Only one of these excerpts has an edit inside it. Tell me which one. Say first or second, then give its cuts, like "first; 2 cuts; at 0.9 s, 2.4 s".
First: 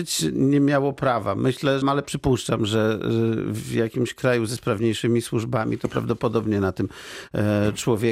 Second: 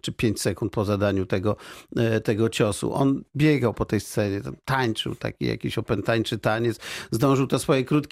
first; 1 cut; at 1.8 s